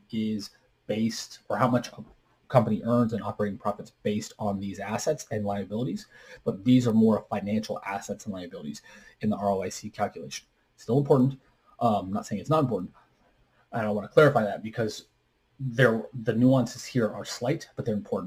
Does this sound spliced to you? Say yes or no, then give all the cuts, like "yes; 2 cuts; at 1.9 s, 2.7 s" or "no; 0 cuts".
no; 0 cuts